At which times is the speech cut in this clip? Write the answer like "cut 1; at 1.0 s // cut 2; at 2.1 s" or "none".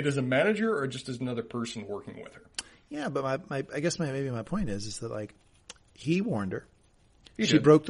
none